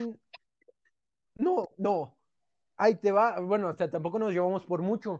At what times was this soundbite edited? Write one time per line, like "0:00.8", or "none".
none